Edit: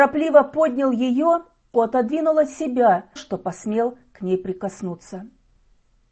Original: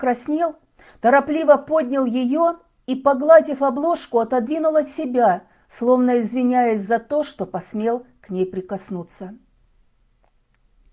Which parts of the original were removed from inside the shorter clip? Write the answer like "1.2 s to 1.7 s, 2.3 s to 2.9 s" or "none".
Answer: 2.9 s to 4.1 s, 5.5 s to 7.2 s